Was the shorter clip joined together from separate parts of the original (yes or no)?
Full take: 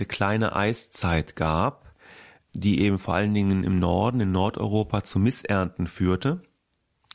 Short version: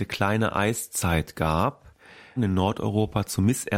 yes